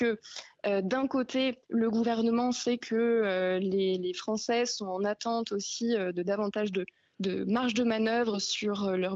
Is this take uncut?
no; 1 cut; at 1.6 s

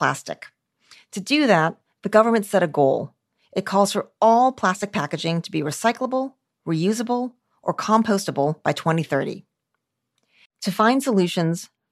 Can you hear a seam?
yes; 1 cut; at 10.4 s

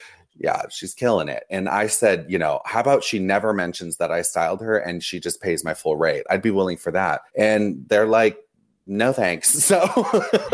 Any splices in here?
yes; 1 cut; at 7.3 s

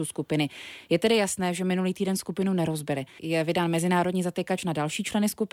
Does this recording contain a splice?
yes; 1 cut; at 3.2 s

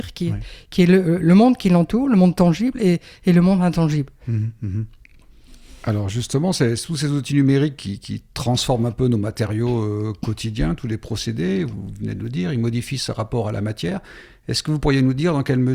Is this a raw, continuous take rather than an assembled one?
yes; 0 cuts

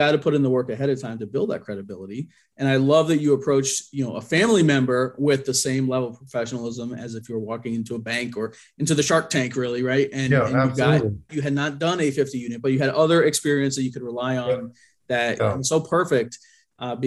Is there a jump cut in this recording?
yes; 2 cuts; at 11.3 s, 15.4 s

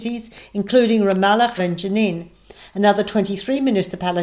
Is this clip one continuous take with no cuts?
no; 1 cut; at 1.6 s

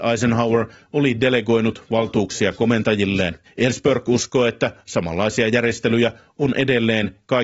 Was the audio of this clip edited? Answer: yes; 1 cut; at 3.5 s

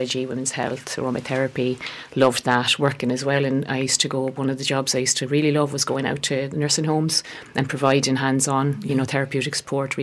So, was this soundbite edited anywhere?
no; 0 cuts

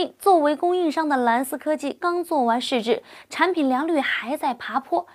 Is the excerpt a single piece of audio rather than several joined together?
no; 1 cut; at 2.0 s

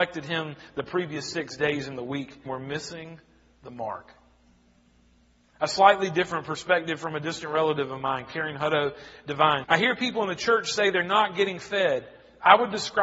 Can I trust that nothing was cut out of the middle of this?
no; 2 cuts; at 2.5 s, 9.6 s

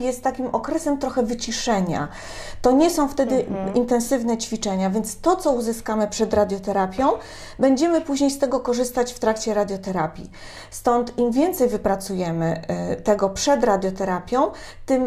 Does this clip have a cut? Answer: no; 0 cuts

